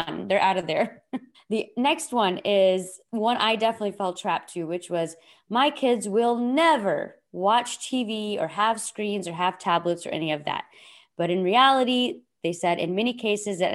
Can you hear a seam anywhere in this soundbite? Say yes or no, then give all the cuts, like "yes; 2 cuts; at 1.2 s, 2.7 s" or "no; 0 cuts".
yes; 1 cut; at 1.3 s